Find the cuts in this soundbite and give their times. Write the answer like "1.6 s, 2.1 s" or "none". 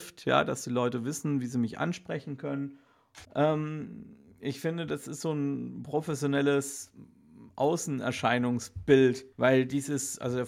3.2 s, 9.3 s